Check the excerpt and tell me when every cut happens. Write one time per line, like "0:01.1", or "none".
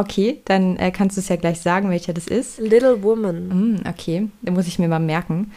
none